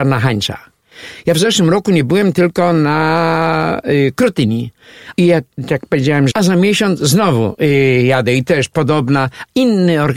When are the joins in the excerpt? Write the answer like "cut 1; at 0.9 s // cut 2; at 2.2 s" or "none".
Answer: cut 1; at 5.1 s // cut 2; at 6.3 s